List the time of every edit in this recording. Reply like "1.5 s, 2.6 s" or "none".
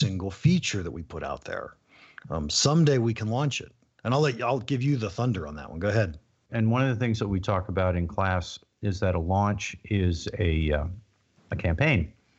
6.5 s